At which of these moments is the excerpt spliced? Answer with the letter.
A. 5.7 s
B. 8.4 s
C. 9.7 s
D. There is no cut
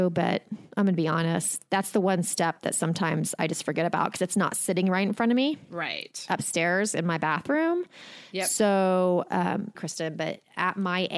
C